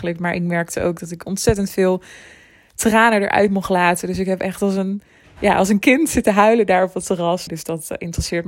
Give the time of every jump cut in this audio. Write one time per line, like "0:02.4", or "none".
0:07.5

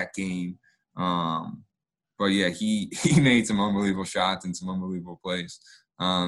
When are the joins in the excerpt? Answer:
none

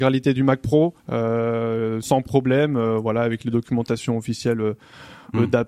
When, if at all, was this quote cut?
0:01.0
0:02.0

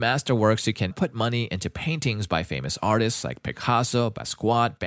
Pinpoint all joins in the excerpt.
0:00.9

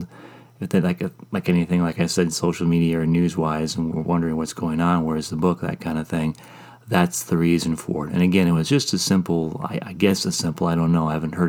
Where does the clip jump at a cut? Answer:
none

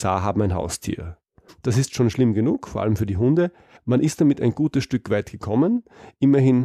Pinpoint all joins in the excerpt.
0:01.5
0:03.8

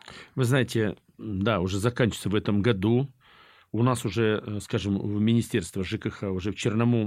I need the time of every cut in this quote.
none

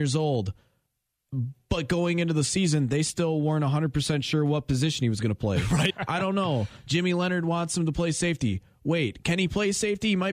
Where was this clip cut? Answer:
0:05.9

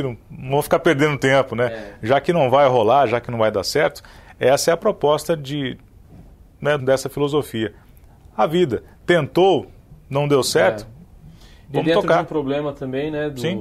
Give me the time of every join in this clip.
0:06.8

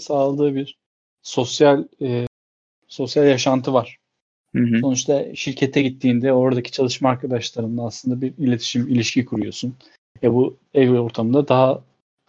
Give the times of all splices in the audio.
none

